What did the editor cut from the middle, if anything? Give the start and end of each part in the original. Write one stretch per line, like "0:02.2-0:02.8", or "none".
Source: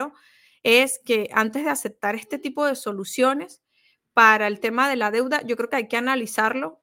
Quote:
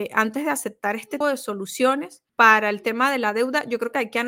0:02.4-0:02.6
0:03.7-0:04.1